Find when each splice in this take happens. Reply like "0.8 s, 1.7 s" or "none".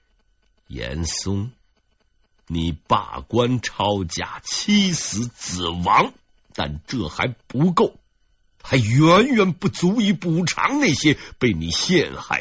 none